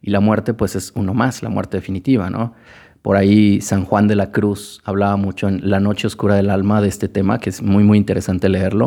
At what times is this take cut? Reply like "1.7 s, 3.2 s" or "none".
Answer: none